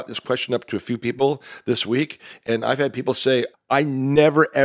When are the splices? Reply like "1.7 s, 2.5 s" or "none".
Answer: 3.5 s